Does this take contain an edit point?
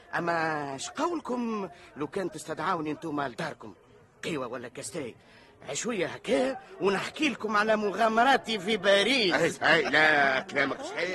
no; 0 cuts

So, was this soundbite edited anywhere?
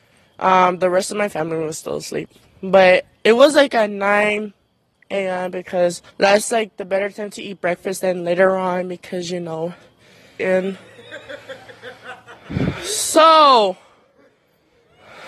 yes; 2 cuts; at 6.1 s, 10.4 s

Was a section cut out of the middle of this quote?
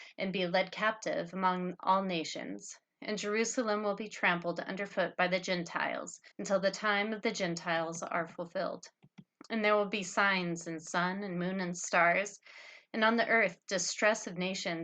yes; 1 cut; at 6.3 s

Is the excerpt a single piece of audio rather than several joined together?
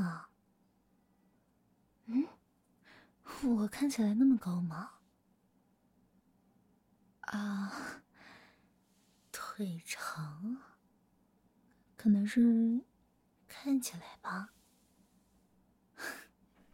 yes; 0 cuts

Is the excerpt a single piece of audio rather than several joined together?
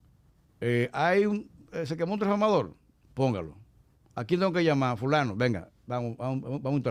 yes; 0 cuts

